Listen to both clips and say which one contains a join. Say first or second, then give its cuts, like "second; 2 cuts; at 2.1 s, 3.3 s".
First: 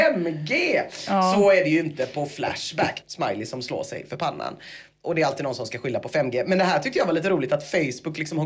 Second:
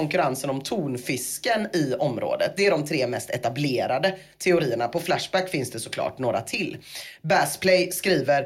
first; 1 cut; at 3.0 s